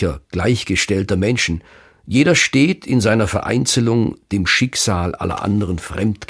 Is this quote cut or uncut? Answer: uncut